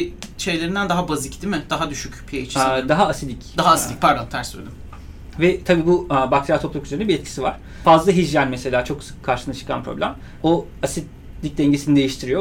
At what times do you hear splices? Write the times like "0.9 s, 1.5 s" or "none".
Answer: none

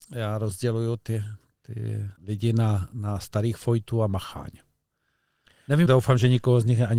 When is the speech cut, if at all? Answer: 2.2 s, 5.9 s

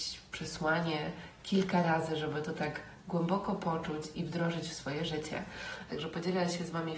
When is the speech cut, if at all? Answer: 4.1 s, 5.9 s

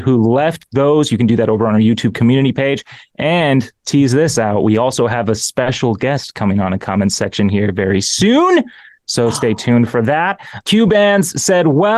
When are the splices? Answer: 10.6 s

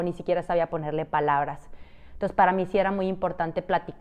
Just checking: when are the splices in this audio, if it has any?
none

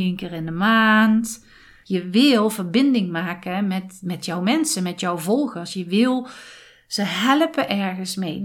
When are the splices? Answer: 1.8 s

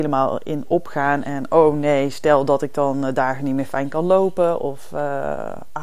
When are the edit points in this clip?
none

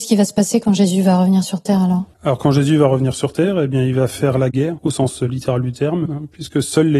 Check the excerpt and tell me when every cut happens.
2.1 s, 4.8 s, 6.0 s

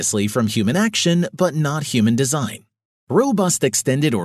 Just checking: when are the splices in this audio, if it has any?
2.9 s

